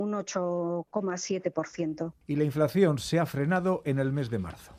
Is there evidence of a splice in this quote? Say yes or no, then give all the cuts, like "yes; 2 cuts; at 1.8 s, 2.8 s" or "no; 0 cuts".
yes; 1 cut; at 2.2 s